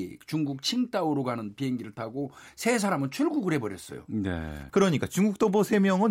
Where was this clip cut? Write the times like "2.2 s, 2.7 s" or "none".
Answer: 4.7 s